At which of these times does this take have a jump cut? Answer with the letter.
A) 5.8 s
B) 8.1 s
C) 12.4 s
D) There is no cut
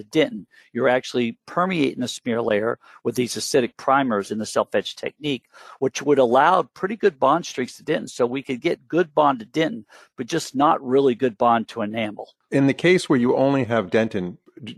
D